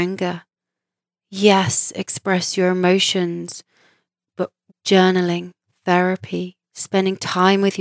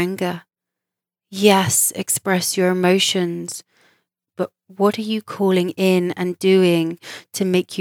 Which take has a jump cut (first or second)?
first